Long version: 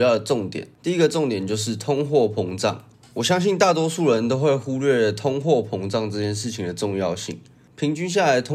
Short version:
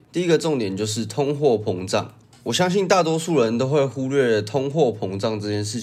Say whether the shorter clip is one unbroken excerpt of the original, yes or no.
yes